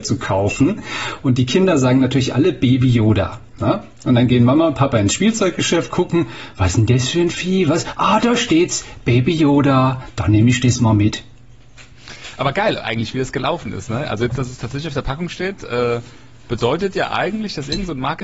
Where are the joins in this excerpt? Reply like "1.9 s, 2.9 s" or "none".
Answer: none